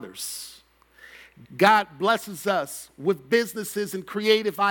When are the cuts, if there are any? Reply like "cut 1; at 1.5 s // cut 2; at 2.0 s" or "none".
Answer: cut 1; at 1.5 s